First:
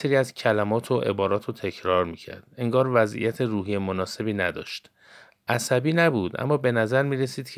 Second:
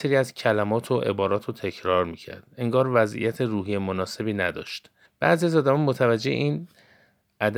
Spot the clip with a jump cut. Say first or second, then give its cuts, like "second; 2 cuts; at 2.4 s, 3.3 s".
second; 1 cut; at 5.0 s